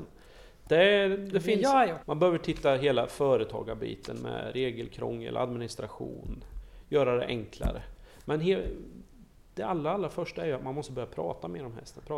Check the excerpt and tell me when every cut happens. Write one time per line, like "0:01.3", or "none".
0:02.0